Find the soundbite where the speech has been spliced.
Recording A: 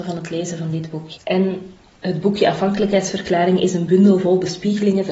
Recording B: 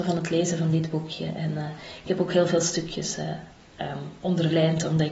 A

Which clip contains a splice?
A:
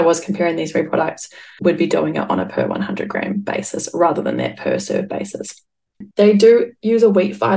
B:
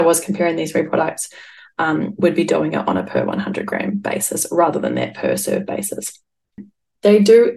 A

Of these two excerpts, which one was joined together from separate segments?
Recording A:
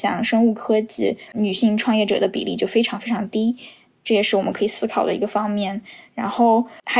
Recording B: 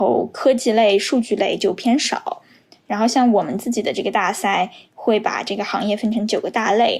A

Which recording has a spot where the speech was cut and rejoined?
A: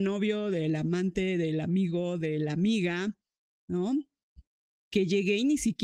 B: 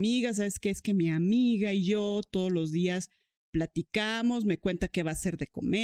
A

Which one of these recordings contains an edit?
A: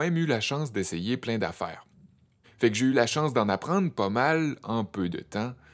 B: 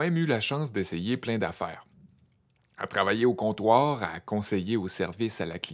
A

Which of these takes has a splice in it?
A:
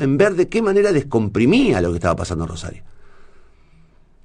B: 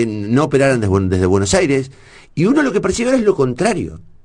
B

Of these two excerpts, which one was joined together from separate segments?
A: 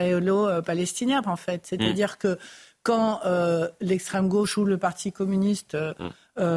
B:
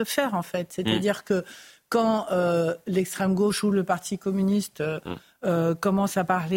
A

